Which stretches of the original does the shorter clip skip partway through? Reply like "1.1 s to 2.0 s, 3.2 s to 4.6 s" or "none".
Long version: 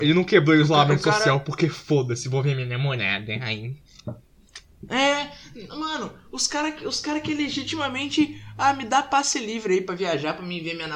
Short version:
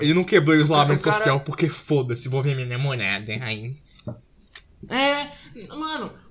none